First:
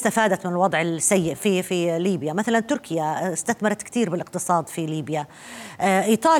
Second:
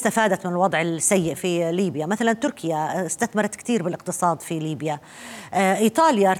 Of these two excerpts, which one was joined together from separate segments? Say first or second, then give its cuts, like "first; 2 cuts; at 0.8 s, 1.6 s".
second; 1 cut; at 1.4 s